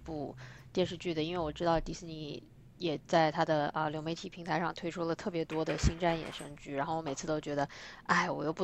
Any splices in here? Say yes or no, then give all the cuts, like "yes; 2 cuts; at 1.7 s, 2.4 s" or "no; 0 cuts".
no; 0 cuts